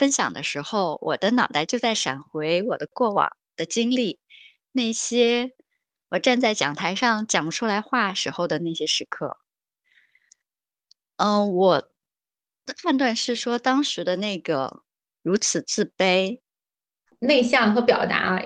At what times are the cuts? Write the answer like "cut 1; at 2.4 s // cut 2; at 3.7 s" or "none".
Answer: cut 1; at 17.1 s